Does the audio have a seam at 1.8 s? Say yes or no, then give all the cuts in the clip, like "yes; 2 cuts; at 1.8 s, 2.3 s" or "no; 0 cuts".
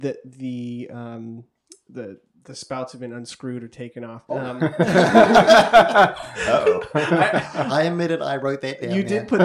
no; 1 cut; at 4.3 s